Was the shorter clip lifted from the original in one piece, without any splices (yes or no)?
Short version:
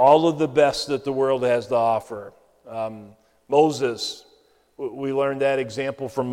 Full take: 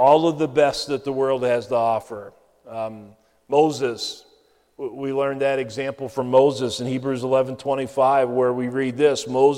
yes